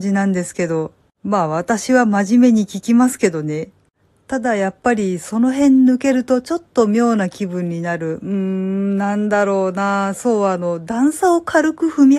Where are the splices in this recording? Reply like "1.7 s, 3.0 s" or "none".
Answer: none